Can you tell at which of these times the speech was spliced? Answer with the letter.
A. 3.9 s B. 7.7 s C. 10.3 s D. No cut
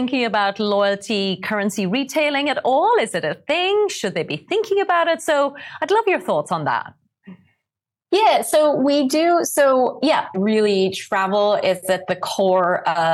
C